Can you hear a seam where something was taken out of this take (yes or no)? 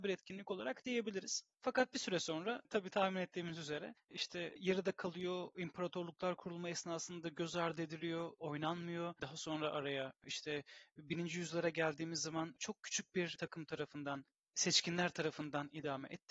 yes